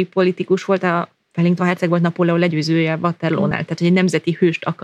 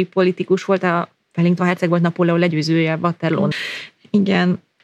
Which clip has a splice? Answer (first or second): second